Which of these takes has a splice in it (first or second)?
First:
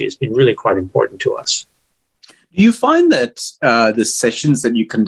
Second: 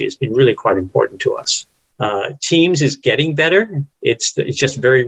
second